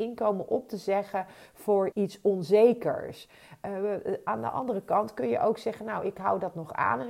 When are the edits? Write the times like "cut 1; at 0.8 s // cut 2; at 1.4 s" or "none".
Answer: cut 1; at 1.9 s

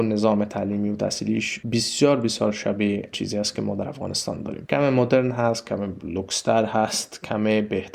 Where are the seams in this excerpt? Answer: none

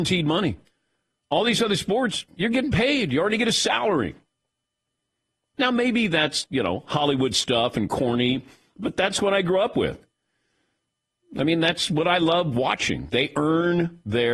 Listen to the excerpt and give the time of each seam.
cut 1; at 5.5 s

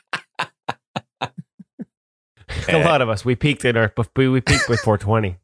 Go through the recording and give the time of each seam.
cut 1; at 2.7 s

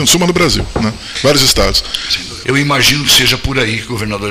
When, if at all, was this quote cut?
cut 1; at 2.4 s

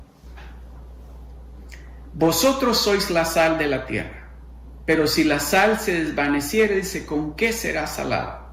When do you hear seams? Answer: none

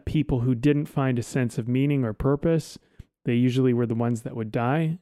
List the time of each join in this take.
none

